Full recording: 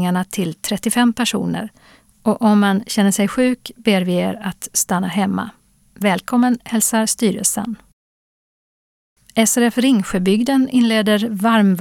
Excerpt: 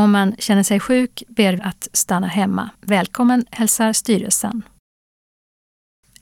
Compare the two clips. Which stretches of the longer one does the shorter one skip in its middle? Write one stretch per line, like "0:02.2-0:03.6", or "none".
0:04.1-0:04.4
0:05.5-0:05.9